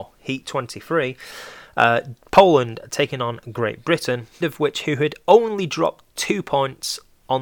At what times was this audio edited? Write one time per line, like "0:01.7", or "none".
0:04.4